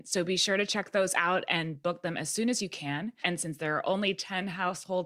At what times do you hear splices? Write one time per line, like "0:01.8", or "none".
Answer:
0:03.2

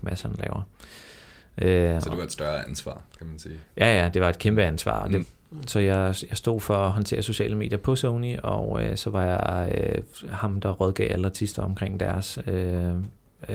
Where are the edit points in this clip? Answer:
0:05.2

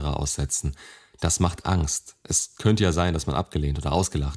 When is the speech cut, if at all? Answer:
none

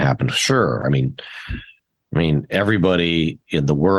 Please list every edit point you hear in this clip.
none

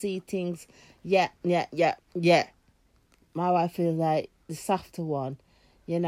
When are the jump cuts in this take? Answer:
0:02.0

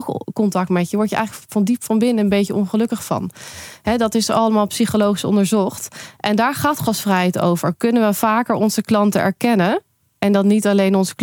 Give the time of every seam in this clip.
none

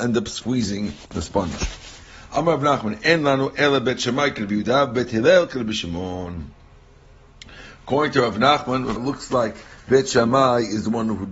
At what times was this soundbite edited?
0:09.0

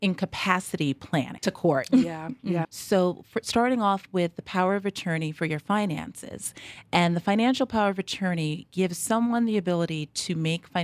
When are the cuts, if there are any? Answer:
0:01.4
0:02.6

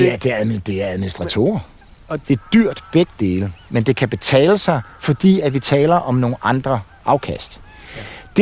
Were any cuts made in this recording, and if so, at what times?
0:02.2

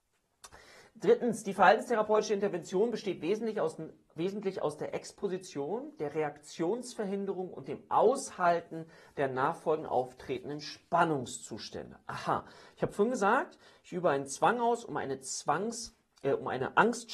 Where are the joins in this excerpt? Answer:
none

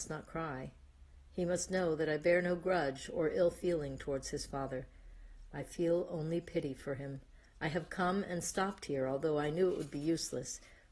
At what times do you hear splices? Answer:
none

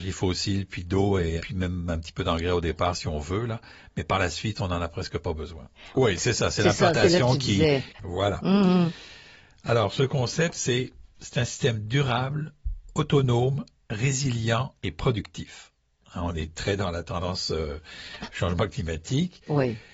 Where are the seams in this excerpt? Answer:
0:01.4
0:05.9
0:07.9

